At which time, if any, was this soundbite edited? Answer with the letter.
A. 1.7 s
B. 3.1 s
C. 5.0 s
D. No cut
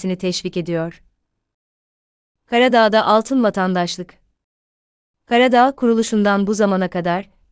D